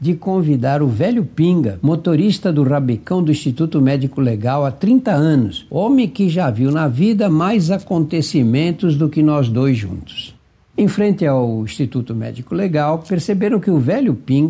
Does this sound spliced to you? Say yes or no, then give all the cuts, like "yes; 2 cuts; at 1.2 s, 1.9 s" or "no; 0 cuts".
no; 0 cuts